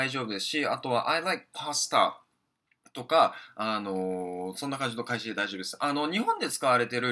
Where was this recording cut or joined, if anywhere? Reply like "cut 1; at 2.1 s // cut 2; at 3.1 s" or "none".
none